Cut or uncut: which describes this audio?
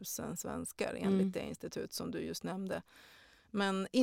uncut